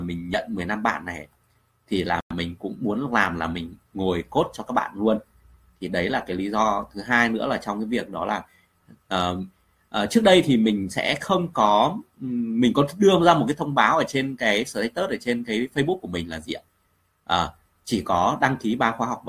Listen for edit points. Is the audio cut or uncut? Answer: uncut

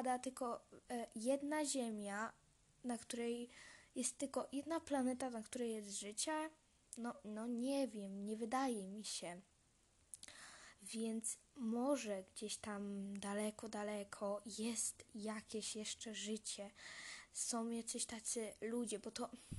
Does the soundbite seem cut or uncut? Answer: uncut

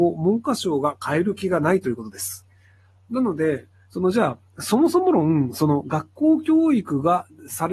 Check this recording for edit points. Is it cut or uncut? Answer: uncut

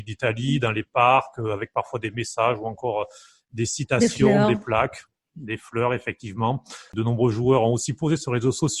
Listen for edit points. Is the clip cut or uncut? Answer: cut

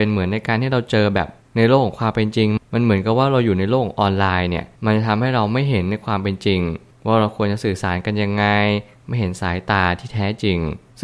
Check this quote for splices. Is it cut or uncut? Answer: cut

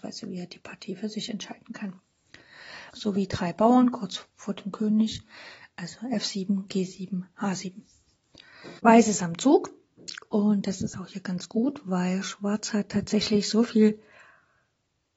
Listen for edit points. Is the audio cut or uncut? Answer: cut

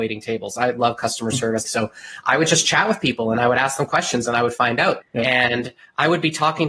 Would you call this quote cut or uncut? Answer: cut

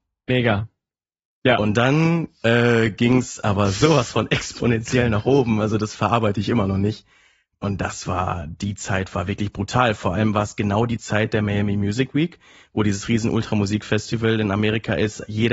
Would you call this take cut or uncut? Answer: uncut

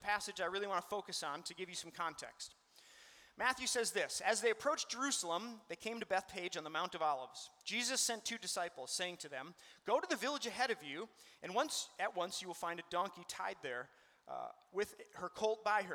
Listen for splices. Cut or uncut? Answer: uncut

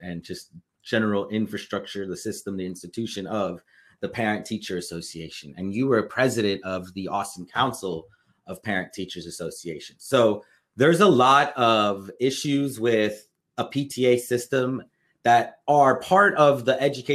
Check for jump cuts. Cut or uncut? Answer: uncut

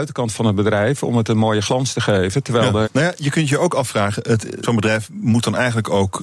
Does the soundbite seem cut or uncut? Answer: cut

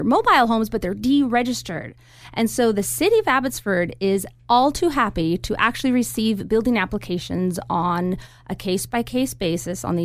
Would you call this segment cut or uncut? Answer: cut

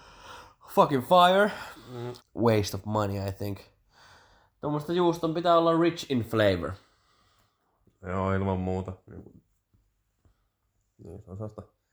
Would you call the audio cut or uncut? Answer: cut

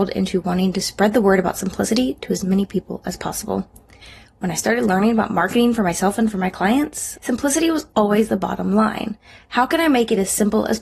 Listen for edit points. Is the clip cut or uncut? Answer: cut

